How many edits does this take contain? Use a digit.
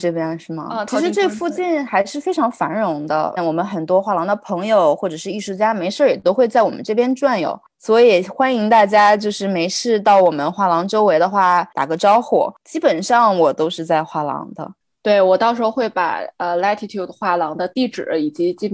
1